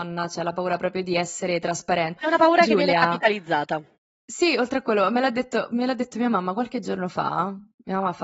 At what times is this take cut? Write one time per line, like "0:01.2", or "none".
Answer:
0:02.2